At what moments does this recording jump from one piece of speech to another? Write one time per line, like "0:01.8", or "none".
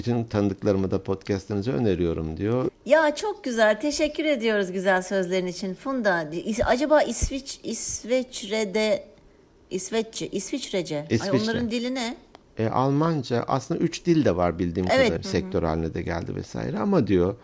0:02.7
0:15.2